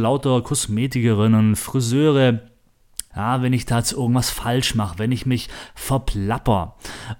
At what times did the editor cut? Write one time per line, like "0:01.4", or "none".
0:03.1